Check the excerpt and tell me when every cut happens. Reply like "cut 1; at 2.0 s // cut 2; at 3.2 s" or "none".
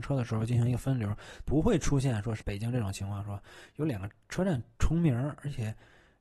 cut 1; at 1.5 s